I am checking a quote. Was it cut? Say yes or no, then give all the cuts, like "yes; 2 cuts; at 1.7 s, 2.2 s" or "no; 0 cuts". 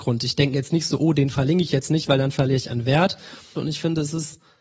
yes; 1 cut; at 3.5 s